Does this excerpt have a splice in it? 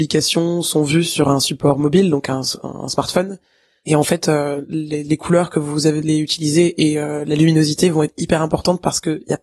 no; 0 cuts

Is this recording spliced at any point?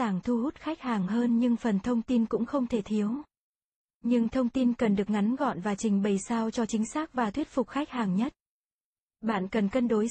yes; 1 cut; at 9.1 s

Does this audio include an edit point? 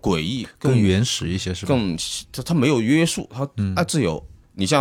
no; 0 cuts

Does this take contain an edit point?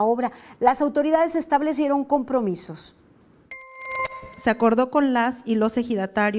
no; 0 cuts

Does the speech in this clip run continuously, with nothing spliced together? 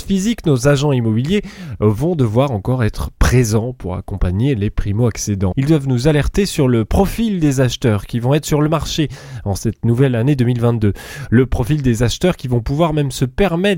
no; 1 cut; at 5.5 s

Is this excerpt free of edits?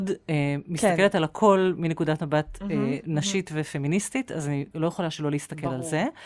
yes; 0 cuts

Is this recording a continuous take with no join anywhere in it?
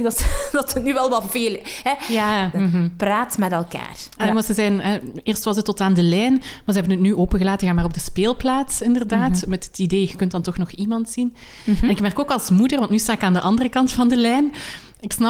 no; 2 cuts; at 2.5 s, 4.2 s

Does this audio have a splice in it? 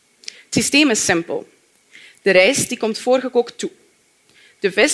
no; 0 cuts

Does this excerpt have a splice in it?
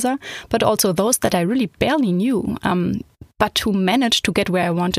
no; 0 cuts

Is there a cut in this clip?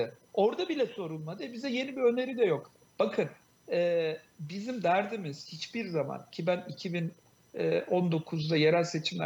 no; 0 cuts

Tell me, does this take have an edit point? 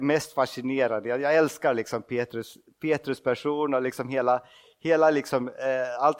no; 0 cuts

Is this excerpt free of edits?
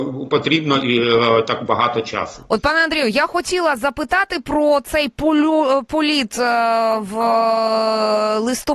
yes; 0 cuts

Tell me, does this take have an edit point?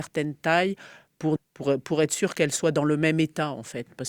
yes; 1 cut; at 1.4 s

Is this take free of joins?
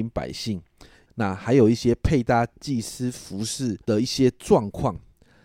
no; 2 cuts; at 1.1 s, 3.8 s

